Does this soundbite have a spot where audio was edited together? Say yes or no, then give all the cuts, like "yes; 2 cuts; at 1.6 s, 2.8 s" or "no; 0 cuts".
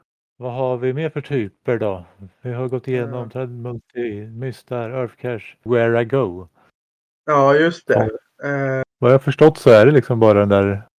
yes; 2 cuts; at 5.7 s, 8.8 s